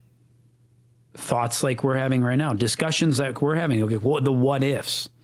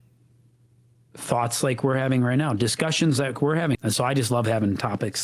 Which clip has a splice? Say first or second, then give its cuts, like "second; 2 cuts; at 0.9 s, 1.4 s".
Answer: second; 1 cut; at 3.7 s